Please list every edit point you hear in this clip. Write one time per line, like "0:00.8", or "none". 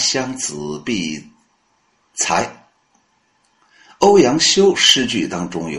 none